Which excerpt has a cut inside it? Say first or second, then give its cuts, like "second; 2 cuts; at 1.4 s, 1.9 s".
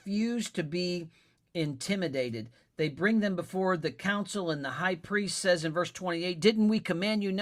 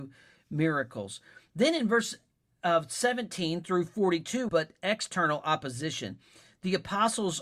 second; 1 cut; at 4.5 s